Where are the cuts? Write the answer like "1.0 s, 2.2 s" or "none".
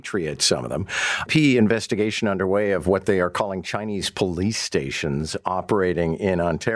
1.3 s